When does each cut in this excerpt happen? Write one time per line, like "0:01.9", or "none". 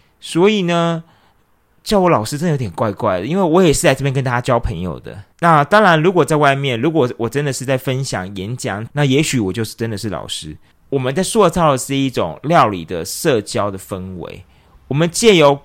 0:05.3
0:08.9
0:10.7